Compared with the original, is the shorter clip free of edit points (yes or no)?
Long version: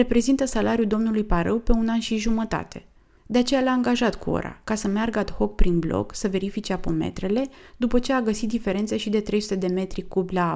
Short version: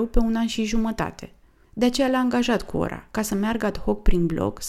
yes